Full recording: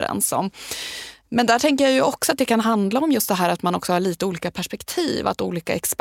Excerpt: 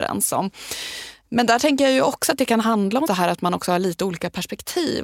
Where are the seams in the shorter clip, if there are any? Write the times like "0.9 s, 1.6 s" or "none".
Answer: 3.1 s